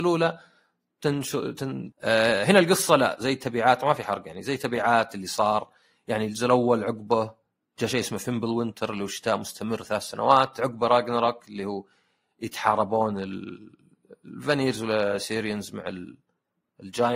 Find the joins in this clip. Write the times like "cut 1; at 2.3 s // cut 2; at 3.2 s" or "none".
cut 1; at 1.9 s